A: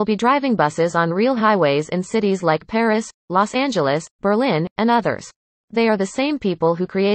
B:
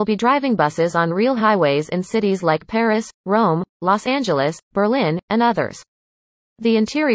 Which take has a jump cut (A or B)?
A